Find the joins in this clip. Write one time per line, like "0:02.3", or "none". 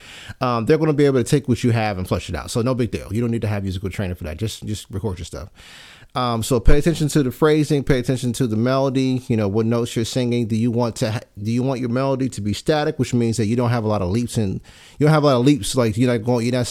none